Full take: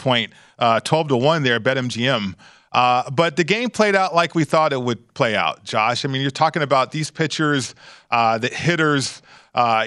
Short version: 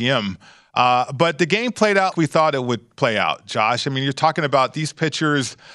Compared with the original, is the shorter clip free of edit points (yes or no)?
no